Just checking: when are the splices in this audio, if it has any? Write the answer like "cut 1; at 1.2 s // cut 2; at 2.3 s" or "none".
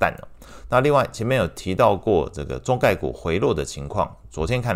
none